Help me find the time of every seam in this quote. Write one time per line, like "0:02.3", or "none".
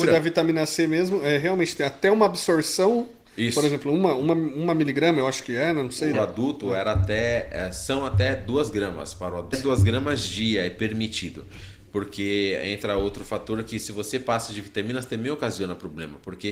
0:06.1
0:09.5